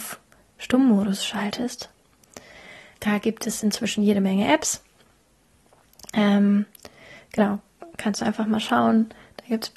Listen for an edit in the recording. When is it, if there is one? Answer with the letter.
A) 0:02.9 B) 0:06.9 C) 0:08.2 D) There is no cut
A